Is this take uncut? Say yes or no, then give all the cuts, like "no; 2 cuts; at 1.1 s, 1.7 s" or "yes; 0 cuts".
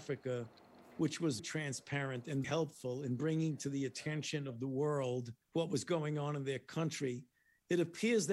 no; 3 cuts; at 1.4 s, 2.4 s, 5.4 s